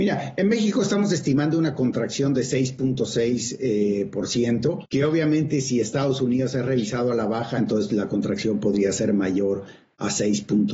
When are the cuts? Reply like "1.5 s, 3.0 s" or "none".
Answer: 4.8 s, 7.6 s